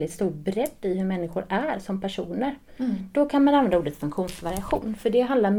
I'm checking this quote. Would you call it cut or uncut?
uncut